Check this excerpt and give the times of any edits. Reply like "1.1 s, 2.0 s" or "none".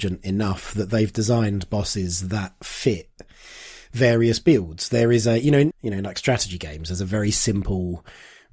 5.7 s